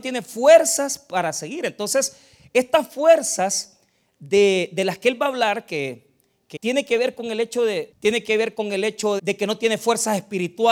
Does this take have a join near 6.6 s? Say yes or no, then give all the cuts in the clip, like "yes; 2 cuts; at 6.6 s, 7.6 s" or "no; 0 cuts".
yes; 3 cuts; at 6.6 s, 7.9 s, 9.2 s